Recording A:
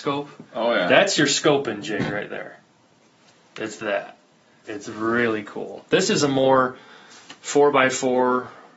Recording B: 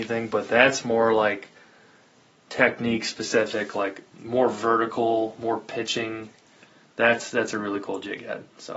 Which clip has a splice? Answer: A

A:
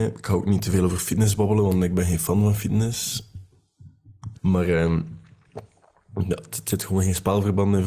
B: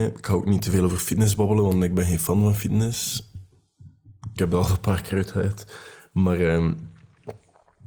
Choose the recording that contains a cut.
A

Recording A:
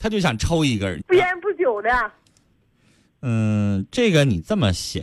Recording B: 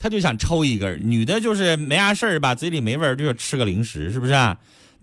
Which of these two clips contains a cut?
A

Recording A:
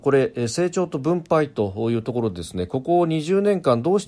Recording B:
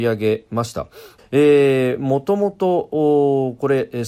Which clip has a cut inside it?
B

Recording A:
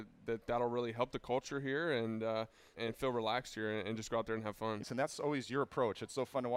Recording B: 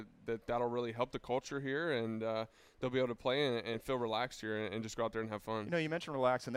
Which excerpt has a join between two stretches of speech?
A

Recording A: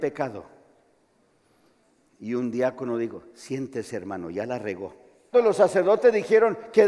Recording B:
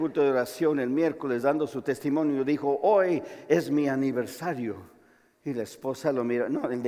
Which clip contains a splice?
A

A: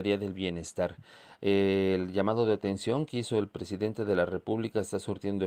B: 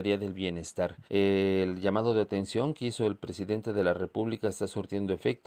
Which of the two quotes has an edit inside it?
B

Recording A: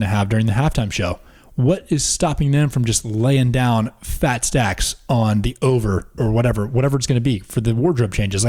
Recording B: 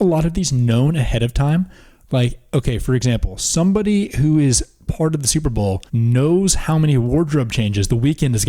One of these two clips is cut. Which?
B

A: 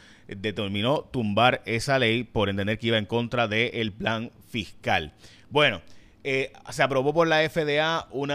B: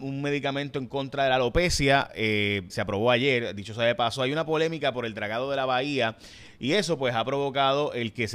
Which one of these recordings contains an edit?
B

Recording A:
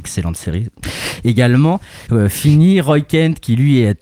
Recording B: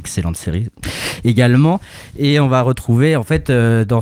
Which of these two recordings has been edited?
A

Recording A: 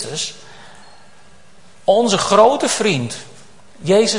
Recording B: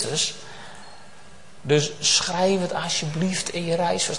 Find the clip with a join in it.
B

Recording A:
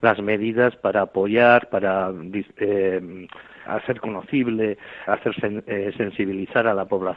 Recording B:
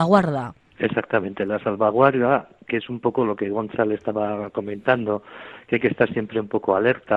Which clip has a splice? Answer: A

